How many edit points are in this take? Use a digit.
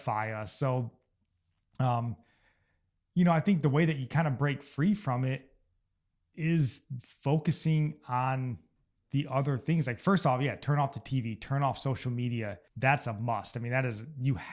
1